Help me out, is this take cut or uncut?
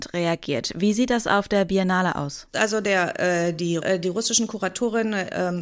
cut